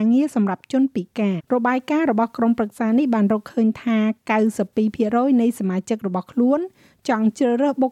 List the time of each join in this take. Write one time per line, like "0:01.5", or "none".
0:01.4